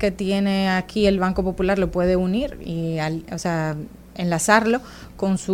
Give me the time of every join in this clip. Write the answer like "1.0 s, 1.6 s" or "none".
none